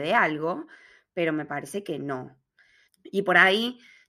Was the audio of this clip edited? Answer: yes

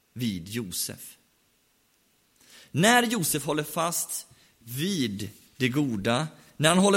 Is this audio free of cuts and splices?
yes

